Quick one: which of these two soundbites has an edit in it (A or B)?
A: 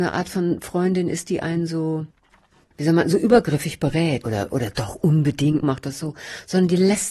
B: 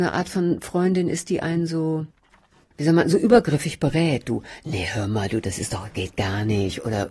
A